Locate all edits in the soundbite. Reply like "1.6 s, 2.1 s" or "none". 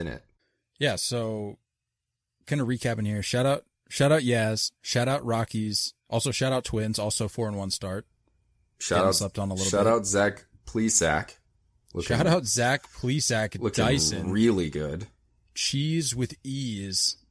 none